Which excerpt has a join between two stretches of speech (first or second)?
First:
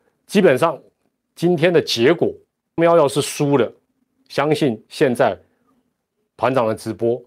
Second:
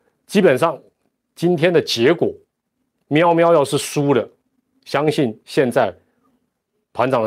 first